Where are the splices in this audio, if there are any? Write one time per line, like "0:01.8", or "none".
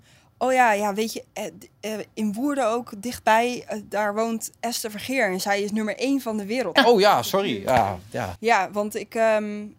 0:06.8
0:08.4